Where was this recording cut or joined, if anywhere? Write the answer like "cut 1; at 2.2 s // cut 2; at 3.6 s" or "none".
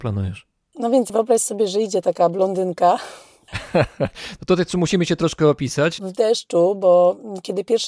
cut 1; at 6.0 s